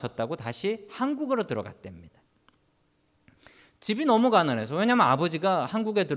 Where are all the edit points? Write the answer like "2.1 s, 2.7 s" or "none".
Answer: none